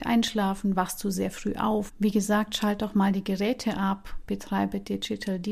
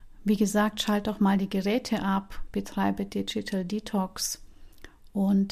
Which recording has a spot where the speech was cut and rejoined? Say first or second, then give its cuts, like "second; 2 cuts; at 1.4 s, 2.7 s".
first; 1 cut; at 1.9 s